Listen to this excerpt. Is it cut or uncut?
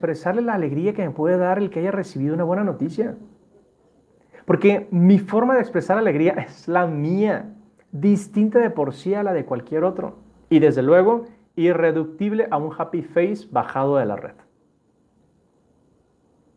uncut